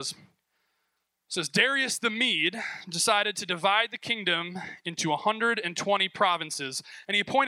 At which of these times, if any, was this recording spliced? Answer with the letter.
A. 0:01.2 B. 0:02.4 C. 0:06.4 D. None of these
D